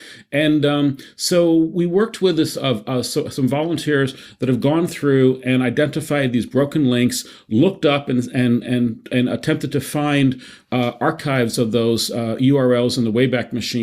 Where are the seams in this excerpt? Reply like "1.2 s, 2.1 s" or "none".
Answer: none

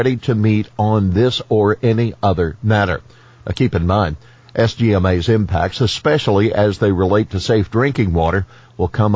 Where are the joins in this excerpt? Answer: none

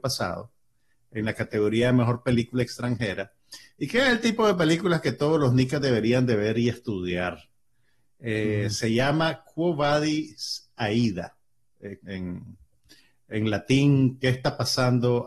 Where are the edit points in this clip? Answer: 12.0 s

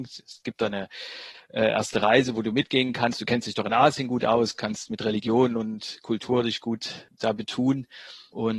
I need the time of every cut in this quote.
none

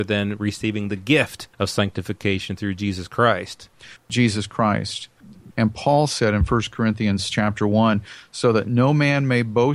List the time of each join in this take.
1.5 s, 4.0 s, 5.5 s

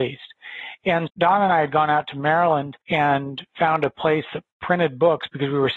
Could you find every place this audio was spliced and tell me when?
1.1 s, 2.8 s

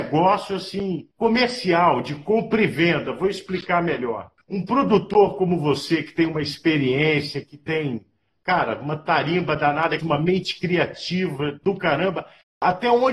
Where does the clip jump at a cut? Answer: 4.4 s, 10.0 s

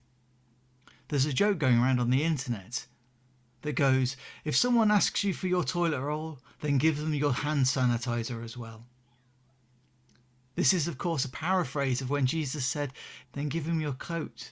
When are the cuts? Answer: 13.2 s

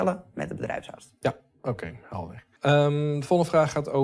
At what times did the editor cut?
2.6 s

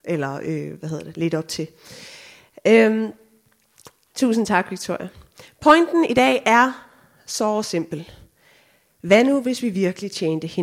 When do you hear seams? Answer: none

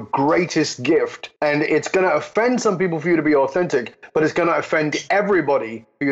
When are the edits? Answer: 1.4 s

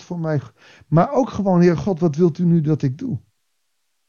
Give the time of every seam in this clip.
none

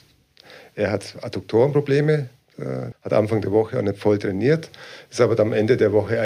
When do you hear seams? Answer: 2.9 s

